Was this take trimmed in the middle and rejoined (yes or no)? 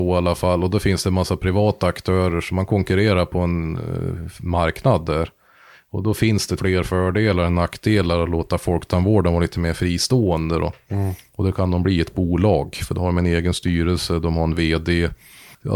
yes